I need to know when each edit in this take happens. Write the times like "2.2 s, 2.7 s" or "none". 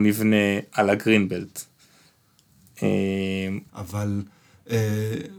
3.7 s